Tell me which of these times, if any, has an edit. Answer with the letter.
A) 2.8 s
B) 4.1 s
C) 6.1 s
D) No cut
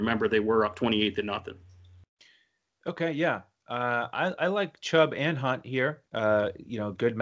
C